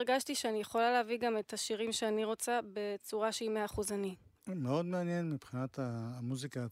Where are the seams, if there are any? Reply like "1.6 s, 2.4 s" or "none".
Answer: 4.4 s